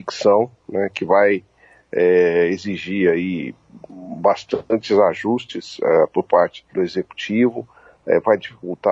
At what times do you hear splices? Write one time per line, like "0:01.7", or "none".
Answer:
0:06.7